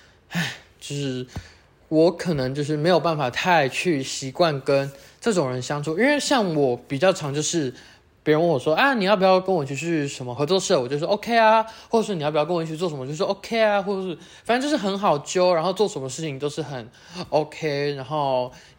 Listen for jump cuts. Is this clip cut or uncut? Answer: uncut